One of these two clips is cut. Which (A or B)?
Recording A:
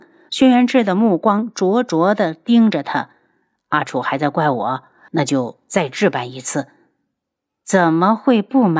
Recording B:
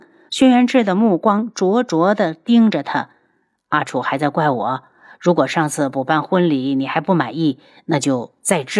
A